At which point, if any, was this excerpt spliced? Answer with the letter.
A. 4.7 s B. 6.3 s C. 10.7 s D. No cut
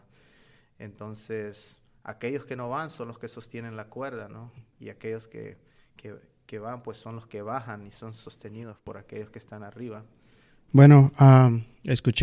C